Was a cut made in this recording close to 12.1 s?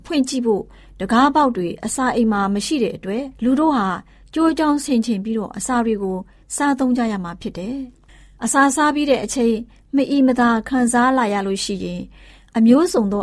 no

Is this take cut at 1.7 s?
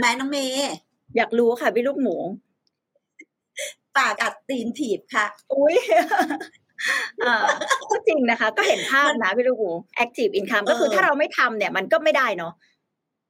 no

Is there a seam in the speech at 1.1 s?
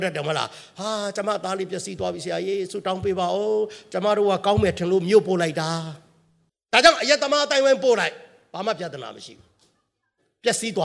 no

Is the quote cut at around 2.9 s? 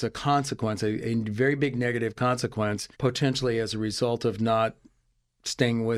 yes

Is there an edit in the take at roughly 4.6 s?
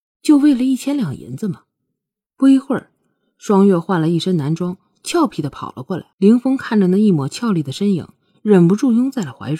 no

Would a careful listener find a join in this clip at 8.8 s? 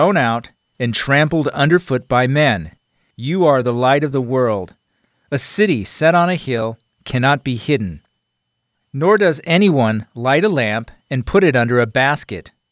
no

